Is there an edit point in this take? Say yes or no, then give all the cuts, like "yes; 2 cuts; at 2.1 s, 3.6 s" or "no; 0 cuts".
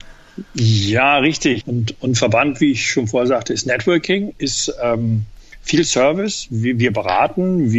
yes; 1 cut; at 1.6 s